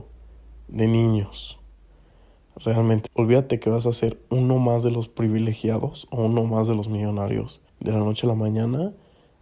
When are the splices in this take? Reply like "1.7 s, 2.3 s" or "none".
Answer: 3.1 s, 7.7 s